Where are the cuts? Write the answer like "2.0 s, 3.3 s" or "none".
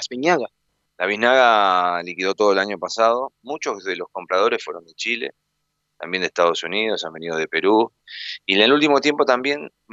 none